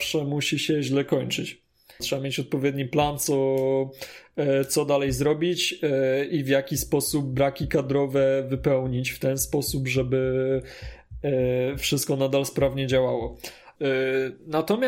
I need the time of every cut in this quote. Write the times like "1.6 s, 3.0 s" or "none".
2.0 s, 13.8 s